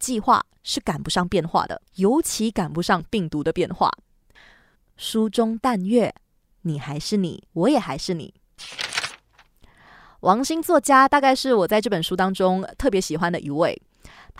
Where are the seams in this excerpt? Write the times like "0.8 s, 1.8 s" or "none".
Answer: 1.9 s, 4.7 s, 7.5 s